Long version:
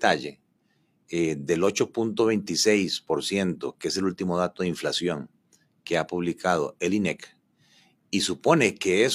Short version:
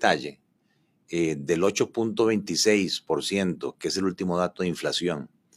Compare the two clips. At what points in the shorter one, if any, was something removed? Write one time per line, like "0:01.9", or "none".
none